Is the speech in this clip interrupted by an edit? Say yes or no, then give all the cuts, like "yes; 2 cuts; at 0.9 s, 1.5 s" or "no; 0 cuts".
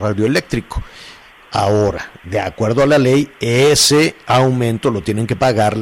no; 0 cuts